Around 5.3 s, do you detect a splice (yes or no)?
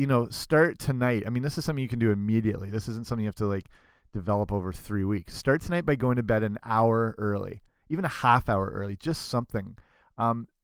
yes